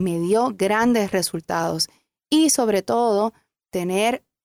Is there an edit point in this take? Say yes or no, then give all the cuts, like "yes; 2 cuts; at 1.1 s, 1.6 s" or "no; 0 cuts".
no; 0 cuts